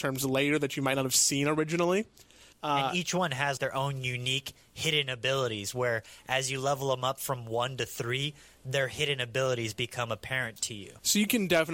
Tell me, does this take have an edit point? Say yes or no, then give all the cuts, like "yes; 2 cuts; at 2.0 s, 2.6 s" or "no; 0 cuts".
yes; 2 cuts; at 2.5 s, 3.6 s